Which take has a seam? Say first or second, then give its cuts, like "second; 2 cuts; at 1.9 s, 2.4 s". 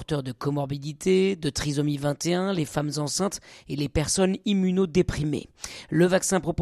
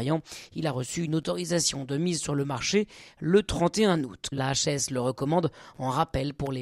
second; 1 cut; at 4.3 s